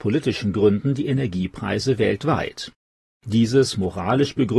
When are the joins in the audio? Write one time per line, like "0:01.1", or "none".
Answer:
none